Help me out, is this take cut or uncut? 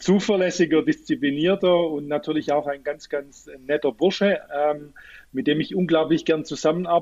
uncut